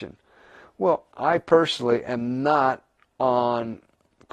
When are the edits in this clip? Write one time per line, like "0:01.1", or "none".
0:01.1